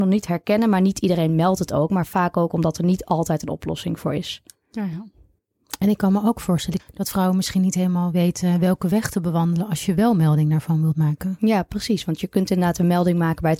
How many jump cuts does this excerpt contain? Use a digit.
1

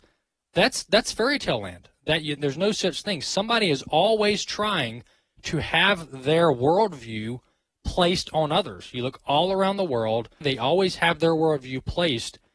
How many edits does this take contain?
2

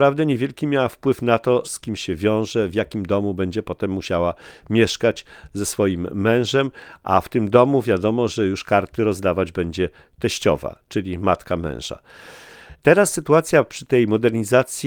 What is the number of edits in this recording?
1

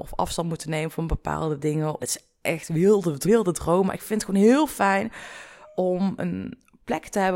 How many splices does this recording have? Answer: 2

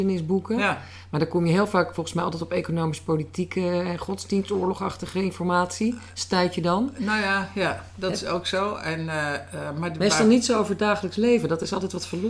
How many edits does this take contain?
0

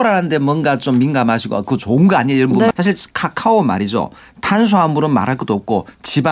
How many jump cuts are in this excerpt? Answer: 1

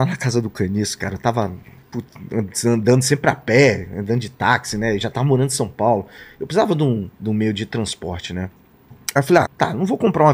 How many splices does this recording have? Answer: 2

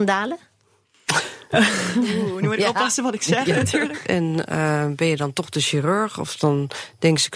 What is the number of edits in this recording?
1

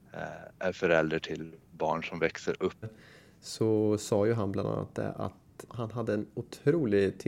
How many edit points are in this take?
2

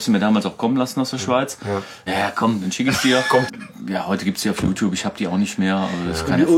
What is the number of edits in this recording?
2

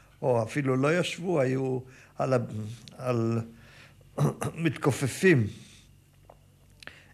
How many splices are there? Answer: 0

